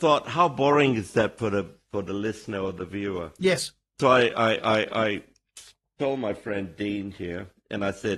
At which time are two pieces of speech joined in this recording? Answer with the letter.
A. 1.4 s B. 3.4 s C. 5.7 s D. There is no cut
D